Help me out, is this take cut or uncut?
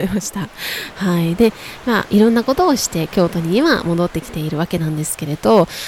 cut